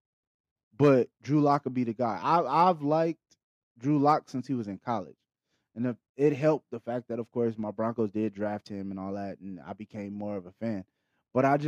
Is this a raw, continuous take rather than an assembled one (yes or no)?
yes